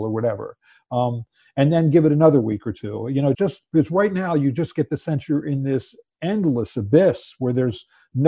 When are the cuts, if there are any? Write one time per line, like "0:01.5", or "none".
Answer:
0:03.3